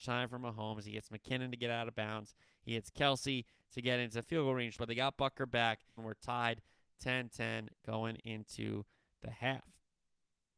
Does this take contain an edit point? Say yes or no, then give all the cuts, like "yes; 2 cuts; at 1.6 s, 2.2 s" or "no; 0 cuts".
yes; 2 cuts; at 4.8 s, 6.0 s